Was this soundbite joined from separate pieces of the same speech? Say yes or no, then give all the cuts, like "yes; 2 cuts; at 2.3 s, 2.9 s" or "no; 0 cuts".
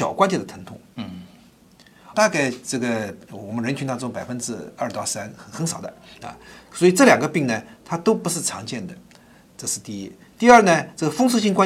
yes; 1 cut; at 2.1 s